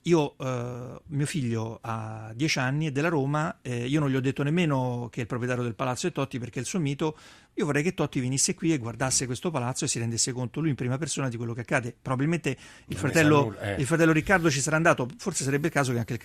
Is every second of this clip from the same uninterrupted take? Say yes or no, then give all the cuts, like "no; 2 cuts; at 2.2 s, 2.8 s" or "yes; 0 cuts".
yes; 0 cuts